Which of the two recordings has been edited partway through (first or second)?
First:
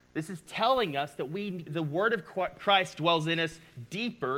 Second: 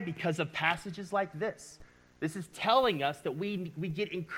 first